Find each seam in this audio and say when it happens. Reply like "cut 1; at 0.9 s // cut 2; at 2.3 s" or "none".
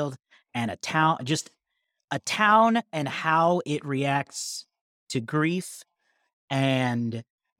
none